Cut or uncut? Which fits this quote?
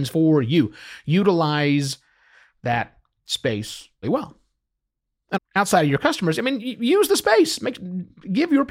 cut